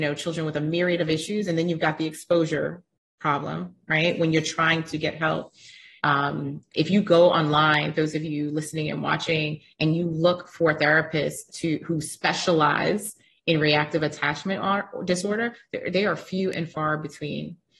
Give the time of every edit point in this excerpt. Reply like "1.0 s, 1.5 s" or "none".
6.0 s

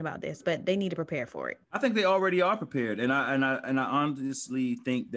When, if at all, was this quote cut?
1.6 s

